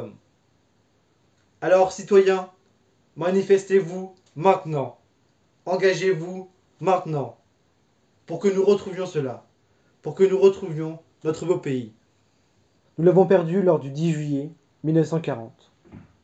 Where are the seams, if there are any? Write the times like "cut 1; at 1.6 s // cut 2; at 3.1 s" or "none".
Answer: cut 1; at 12.8 s